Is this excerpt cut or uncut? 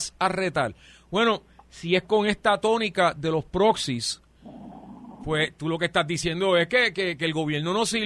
uncut